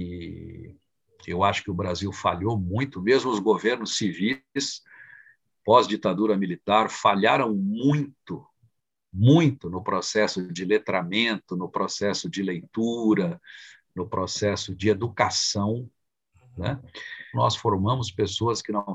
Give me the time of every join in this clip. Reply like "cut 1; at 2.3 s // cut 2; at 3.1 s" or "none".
cut 1; at 14.7 s // cut 2; at 17.3 s